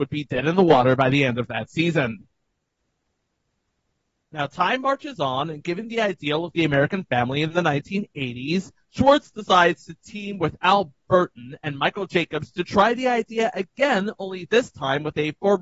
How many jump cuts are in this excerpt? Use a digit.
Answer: 0